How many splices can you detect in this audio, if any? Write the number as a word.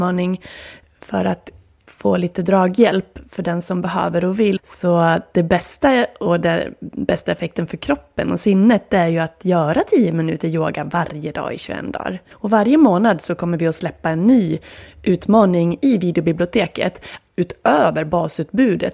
two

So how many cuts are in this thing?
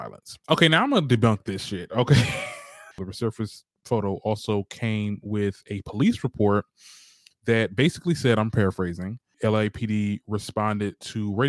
one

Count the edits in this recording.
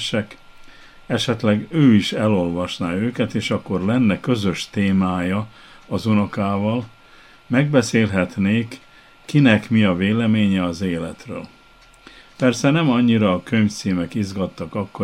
one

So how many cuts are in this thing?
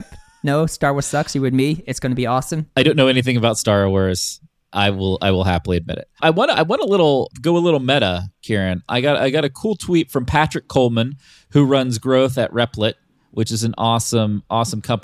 zero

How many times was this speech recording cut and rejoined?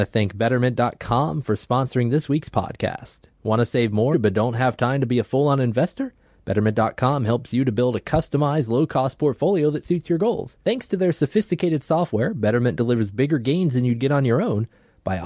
two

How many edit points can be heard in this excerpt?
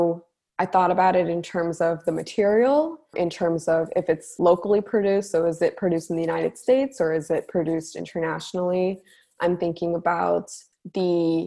one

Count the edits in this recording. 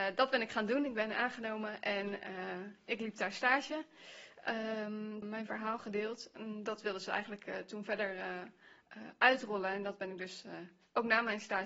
one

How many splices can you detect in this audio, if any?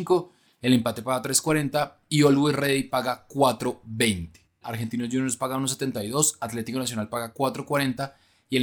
one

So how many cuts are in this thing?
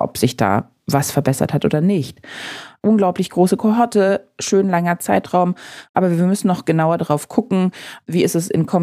one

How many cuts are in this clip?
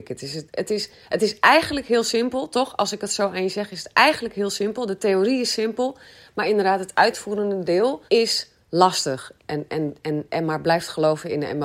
two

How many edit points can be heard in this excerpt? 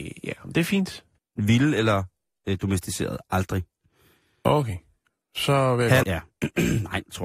two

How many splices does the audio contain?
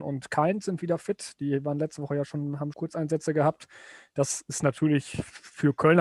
one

